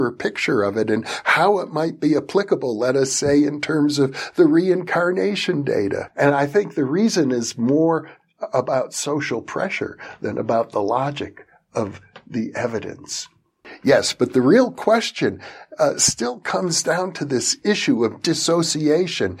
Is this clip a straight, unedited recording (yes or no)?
no